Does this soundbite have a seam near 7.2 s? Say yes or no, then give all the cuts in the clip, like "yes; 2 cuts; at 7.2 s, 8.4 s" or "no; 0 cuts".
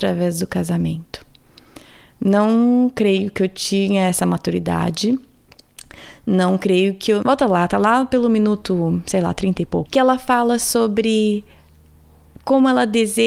yes; 2 cuts; at 7.2 s, 9.9 s